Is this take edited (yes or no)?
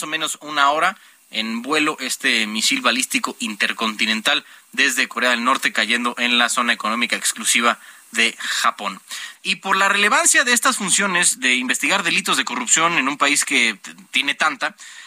yes